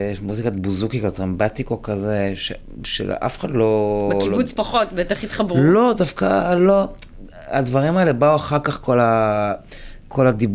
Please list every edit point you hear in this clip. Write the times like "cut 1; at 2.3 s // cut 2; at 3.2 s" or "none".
none